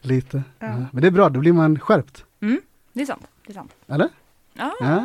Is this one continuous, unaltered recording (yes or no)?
yes